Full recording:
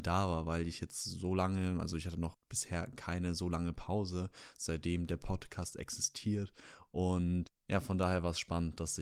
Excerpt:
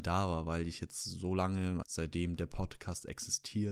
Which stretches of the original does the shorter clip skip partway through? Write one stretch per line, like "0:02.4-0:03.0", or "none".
0:01.8-0:04.5